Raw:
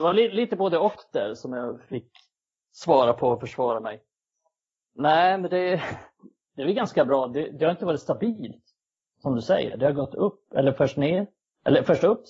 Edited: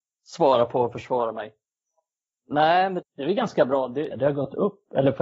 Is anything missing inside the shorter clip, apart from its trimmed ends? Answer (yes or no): yes